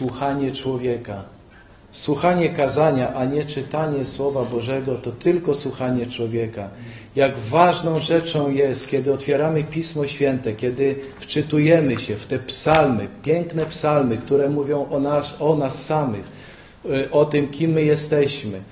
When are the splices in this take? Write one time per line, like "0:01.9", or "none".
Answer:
0:01.8

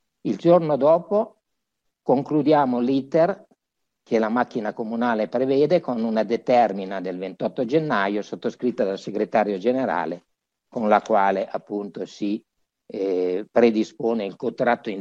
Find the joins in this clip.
none

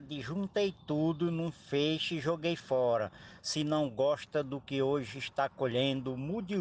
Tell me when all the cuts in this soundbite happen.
0:03.4

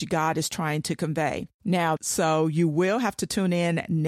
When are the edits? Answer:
0:02.0

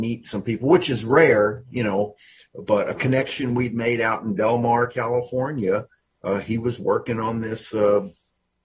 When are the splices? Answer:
none

